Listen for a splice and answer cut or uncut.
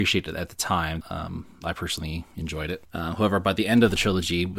cut